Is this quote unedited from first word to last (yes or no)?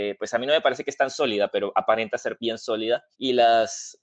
no